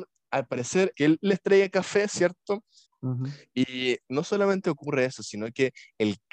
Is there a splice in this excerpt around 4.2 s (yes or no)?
no